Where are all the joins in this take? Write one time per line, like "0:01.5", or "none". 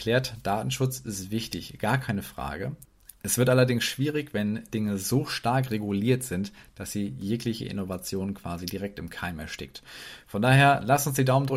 none